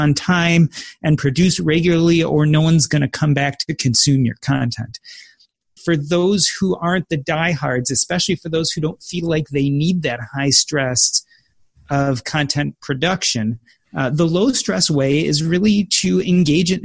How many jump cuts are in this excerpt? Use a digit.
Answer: 1